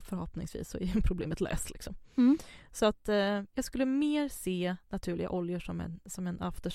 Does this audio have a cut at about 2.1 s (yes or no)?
no